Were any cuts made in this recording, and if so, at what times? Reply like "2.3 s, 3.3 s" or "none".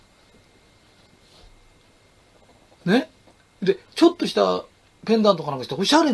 none